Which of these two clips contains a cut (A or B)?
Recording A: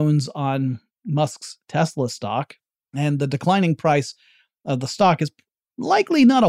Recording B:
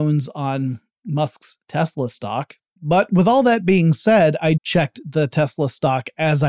B